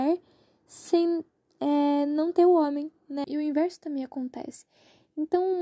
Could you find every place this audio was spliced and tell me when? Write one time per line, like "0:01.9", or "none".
0:03.2